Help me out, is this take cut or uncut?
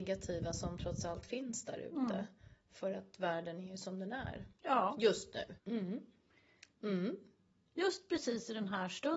cut